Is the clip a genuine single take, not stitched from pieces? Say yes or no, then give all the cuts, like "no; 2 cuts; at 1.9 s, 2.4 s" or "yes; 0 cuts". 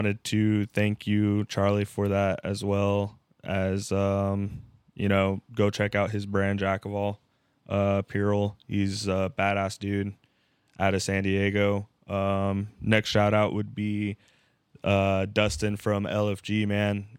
yes; 0 cuts